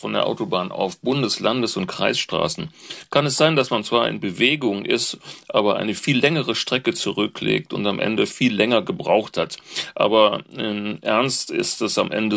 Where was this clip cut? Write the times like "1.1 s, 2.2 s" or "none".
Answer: none